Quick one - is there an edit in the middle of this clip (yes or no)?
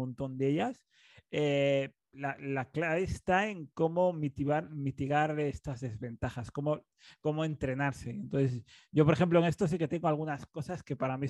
no